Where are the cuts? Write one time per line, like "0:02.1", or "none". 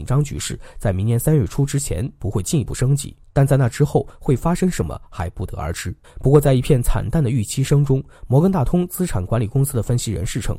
0:06.0